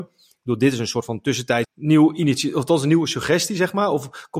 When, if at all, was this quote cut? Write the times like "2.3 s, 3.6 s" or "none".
1.6 s